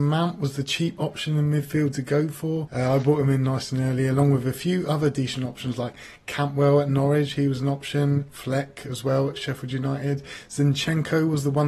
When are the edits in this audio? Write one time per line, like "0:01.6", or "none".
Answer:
none